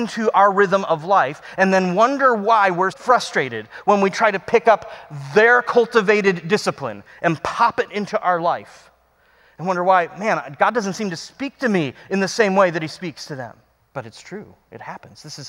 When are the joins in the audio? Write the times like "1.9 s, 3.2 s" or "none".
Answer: 2.9 s, 13.8 s